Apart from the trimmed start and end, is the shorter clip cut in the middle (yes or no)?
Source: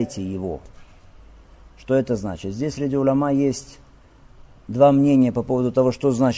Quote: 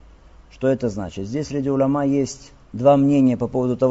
yes